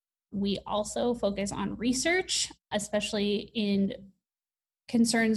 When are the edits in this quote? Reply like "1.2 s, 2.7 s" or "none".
2.6 s